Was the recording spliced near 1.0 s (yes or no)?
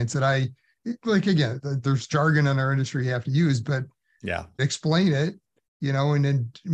no